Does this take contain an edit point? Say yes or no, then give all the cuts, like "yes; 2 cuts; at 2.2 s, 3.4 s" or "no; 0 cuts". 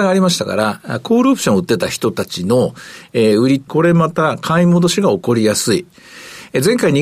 yes; 1 cut; at 3.7 s